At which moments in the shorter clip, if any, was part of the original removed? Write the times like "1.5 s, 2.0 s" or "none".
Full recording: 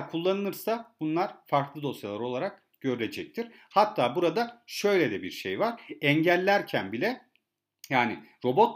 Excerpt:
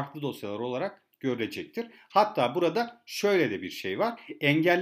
none